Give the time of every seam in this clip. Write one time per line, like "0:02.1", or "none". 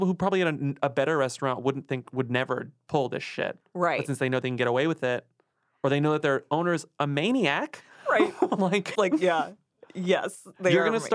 0:08.9